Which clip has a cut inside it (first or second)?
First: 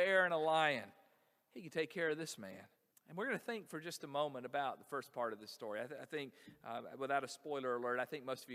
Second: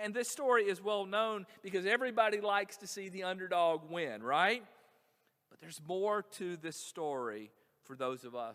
first